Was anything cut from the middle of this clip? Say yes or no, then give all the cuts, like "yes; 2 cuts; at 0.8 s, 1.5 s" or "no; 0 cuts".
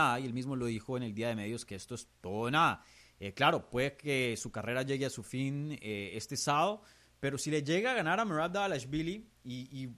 no; 0 cuts